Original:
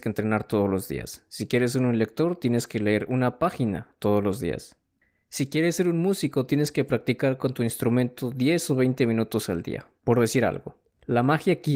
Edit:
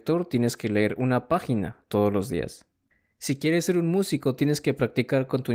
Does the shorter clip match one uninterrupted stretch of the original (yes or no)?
yes